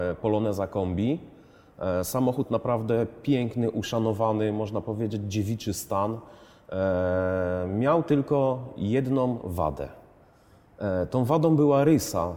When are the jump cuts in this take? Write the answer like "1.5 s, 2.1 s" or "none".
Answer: none

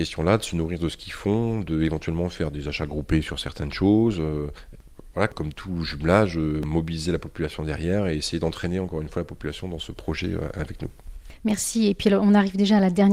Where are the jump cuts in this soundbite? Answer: none

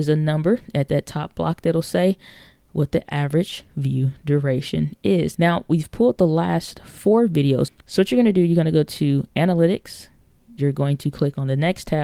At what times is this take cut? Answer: 5.3 s, 7.7 s

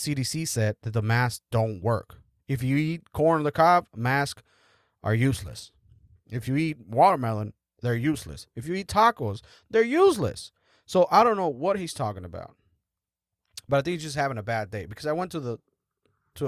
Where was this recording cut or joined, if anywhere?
none

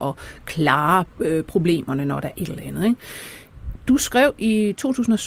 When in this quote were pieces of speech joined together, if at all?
2.3 s

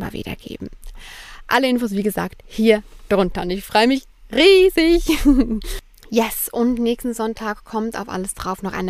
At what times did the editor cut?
none

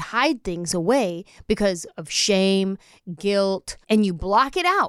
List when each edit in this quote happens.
3.8 s

